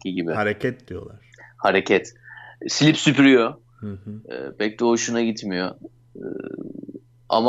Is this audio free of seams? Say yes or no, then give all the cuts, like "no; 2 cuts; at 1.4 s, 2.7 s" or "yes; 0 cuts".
yes; 0 cuts